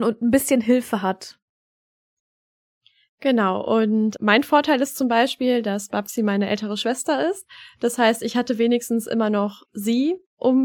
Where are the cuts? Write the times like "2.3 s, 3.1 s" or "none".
none